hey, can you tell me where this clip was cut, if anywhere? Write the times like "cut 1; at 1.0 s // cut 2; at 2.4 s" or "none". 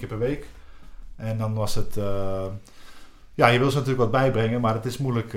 none